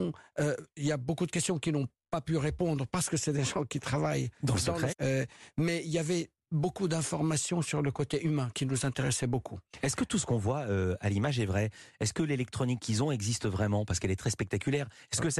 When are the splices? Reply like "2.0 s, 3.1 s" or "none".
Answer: 4.9 s

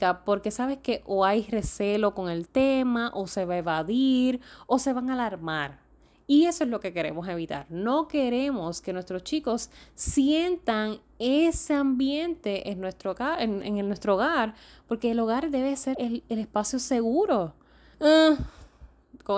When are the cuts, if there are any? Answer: 15.9 s, 17.9 s

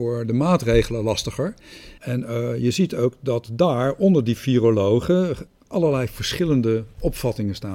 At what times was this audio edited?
2.0 s, 5.5 s

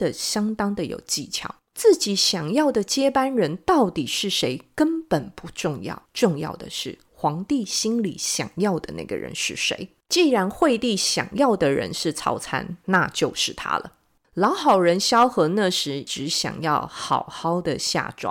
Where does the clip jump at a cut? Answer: 1.7 s

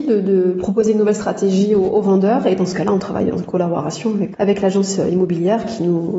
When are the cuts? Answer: 4.3 s

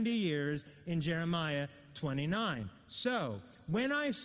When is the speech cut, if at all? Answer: none

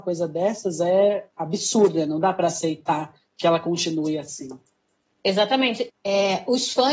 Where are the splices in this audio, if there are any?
5.9 s

